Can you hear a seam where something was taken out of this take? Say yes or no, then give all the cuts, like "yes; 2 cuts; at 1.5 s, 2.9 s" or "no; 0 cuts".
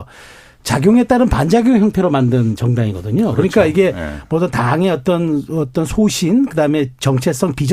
no; 0 cuts